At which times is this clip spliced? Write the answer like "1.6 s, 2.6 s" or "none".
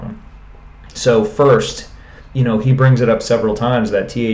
2.3 s